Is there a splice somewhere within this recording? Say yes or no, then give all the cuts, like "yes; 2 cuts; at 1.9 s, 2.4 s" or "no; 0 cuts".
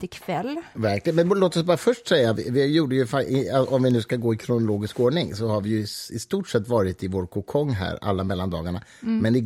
no; 0 cuts